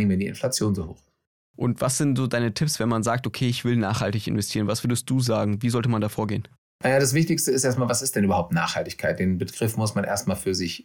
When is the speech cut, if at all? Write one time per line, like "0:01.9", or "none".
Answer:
none

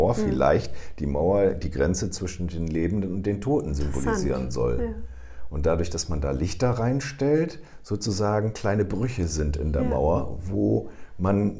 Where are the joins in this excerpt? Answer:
none

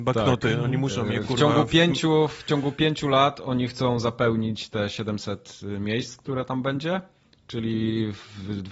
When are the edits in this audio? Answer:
none

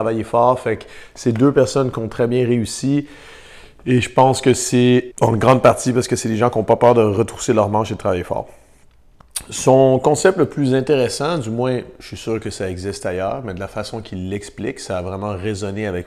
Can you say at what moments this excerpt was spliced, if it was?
0:05.1

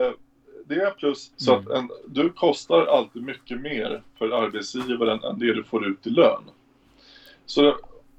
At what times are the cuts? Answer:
0:01.3

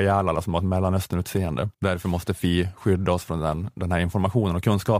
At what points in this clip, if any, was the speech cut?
0:01.7

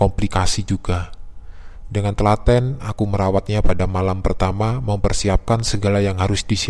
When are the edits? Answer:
0:01.9

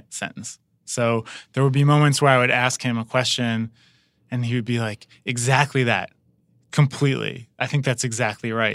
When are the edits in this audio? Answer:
none

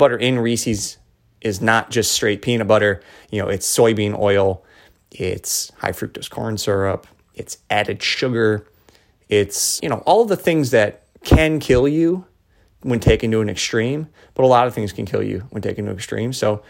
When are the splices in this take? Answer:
0:09.8
0:11.1

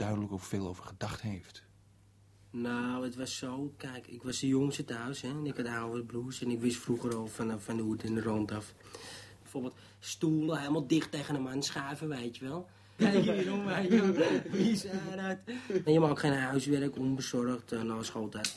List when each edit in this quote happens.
0:09.4
0:13.0
0:15.9

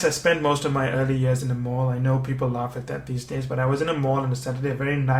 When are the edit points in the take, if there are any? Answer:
none

